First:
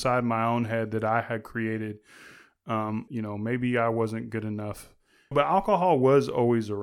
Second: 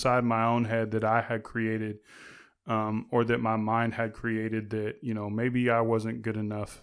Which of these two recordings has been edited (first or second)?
first